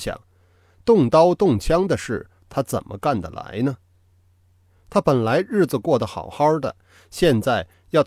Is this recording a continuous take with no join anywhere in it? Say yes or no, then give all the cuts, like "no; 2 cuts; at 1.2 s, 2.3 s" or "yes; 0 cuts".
yes; 0 cuts